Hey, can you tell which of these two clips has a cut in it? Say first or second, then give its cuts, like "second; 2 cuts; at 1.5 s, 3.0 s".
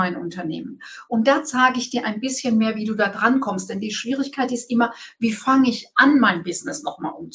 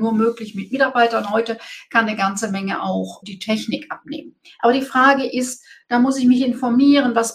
second; 1 cut; at 3.2 s